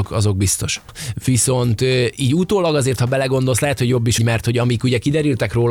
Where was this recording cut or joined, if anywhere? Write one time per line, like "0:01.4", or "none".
0:04.2